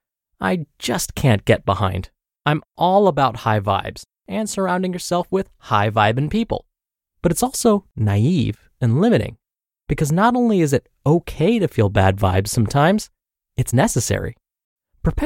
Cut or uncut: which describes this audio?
cut